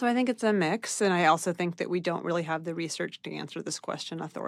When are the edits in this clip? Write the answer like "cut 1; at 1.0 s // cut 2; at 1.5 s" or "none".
none